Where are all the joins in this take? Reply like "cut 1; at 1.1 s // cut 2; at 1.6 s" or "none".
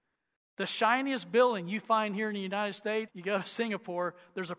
cut 1; at 3.1 s